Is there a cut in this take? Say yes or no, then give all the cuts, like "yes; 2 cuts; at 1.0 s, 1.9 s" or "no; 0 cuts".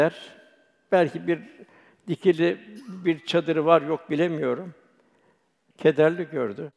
yes; 1 cut; at 5.7 s